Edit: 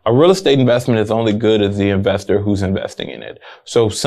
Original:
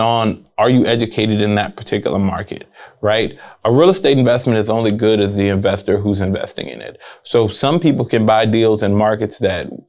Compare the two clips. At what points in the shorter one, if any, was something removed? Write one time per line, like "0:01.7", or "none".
none